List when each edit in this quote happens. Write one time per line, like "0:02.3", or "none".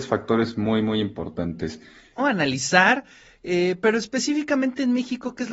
0:02.2